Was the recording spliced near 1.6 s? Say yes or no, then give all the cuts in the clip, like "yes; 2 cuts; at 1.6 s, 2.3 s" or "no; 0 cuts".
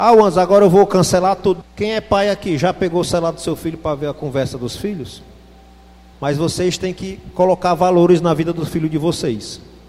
yes; 2 cuts; at 1.6 s, 6.1 s